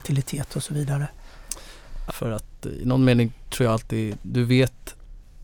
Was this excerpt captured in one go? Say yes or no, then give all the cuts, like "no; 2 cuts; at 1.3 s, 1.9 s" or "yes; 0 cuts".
no; 1 cut; at 2.1 s